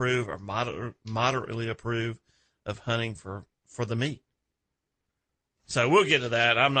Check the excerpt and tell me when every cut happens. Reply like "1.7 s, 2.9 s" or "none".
none